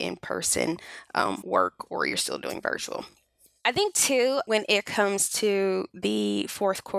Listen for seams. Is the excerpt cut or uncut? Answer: uncut